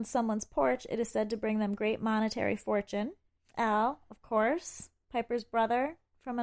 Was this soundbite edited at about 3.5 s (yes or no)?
yes